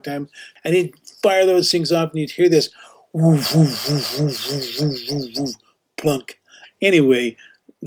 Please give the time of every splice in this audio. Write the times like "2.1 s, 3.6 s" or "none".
6.6 s

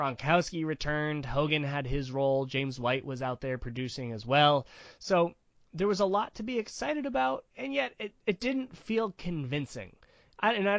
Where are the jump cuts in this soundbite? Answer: 7.5 s

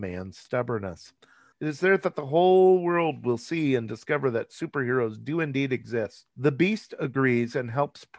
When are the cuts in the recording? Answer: 1.5 s, 6.3 s

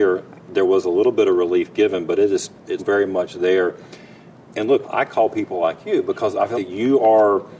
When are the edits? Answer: 2.8 s, 4.8 s, 6.5 s

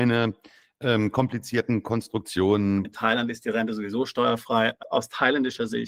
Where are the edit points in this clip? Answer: 2.8 s, 4.8 s

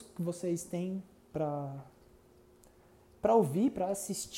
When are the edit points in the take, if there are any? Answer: none

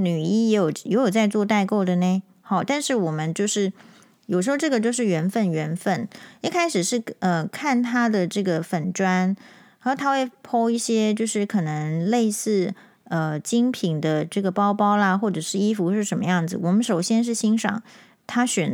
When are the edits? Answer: none

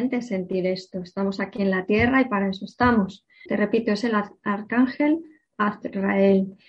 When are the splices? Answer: 3.5 s

